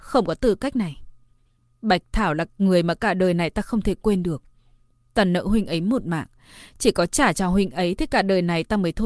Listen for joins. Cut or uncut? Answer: uncut